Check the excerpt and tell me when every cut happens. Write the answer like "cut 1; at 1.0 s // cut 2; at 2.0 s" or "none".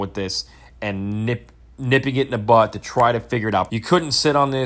cut 1; at 3.7 s